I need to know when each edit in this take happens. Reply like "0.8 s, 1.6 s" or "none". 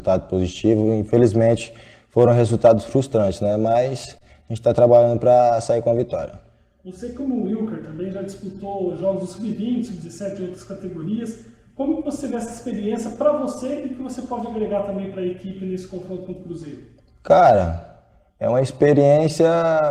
none